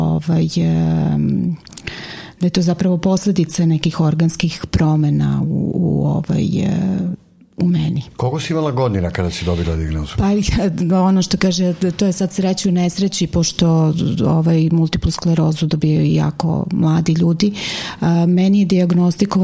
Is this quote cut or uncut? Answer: uncut